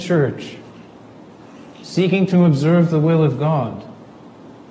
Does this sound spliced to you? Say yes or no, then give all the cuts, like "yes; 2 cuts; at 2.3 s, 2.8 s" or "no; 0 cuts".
yes; 1 cut; at 1.7 s